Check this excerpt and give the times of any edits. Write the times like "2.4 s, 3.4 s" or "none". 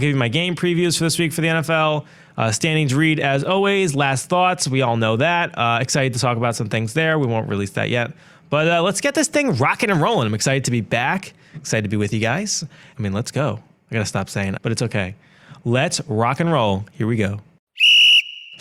14.6 s